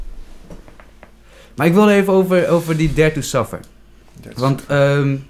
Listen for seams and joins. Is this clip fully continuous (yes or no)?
yes